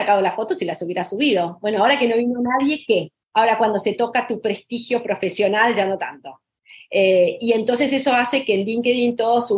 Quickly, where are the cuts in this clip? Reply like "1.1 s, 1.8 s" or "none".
3.2 s